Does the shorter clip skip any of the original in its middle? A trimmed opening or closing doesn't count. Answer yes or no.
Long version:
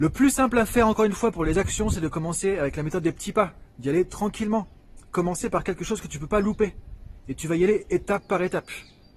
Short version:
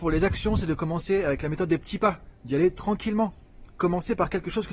no